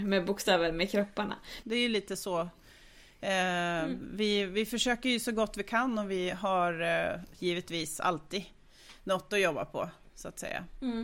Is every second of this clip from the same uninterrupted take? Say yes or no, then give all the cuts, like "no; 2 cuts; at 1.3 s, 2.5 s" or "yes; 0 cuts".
no; 1 cut; at 1.6 s